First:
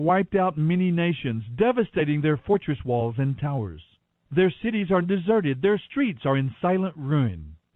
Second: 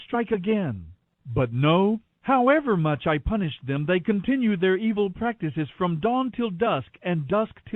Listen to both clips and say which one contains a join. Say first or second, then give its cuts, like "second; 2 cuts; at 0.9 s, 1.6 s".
first; 1 cut; at 5.0 s